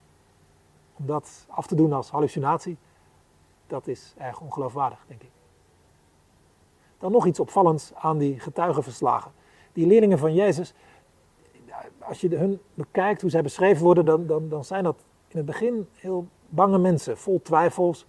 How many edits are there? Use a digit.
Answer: 0